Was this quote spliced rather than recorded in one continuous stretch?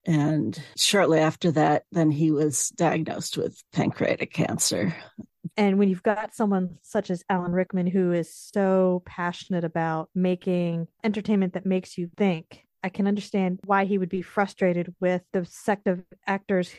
yes; 1 cut; at 5.5 s

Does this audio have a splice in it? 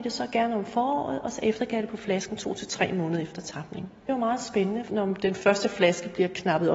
yes; 1 cut; at 4.9 s

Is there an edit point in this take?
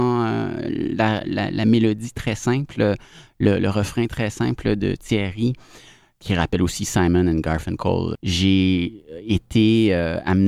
yes; 2 cuts; at 1.2 s, 8.1 s

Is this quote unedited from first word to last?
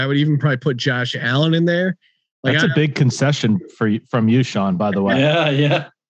yes; 0 cuts

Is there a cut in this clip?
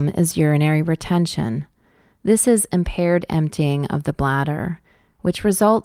no; 0 cuts

